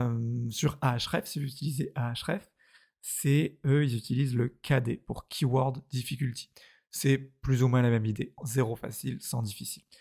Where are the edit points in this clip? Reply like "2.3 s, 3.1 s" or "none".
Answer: 8.4 s